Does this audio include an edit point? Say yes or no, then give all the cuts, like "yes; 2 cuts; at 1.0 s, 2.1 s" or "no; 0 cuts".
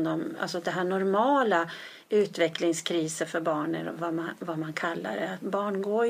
no; 0 cuts